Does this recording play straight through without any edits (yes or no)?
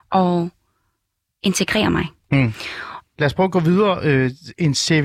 no